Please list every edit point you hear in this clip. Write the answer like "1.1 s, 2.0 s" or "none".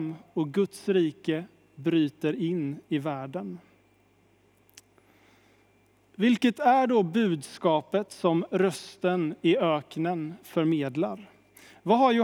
none